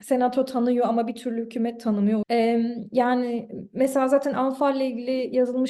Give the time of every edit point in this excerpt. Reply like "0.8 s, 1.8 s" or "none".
2.2 s